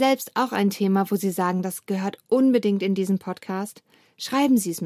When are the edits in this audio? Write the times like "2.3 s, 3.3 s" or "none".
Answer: none